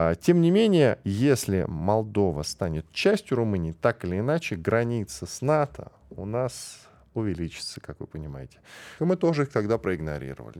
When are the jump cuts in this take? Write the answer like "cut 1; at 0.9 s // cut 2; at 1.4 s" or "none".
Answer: cut 1; at 9.0 s